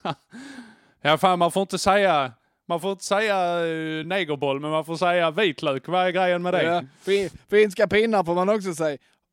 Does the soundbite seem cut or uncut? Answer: uncut